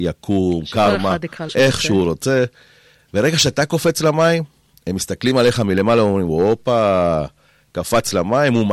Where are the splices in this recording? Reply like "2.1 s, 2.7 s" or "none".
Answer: 1.5 s